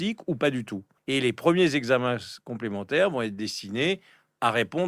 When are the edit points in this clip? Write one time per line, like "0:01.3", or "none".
0:01.0